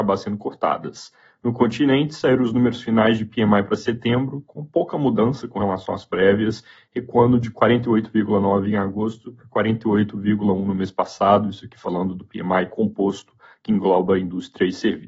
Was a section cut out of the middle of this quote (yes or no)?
no